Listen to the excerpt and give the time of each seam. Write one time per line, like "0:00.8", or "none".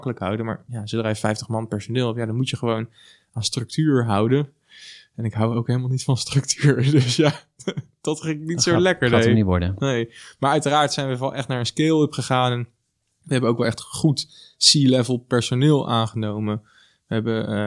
none